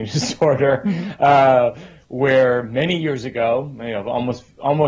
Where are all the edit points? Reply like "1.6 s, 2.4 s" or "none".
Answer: none